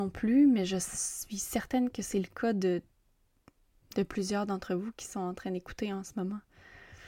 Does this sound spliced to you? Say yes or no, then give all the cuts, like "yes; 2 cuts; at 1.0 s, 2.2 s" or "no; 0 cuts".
no; 0 cuts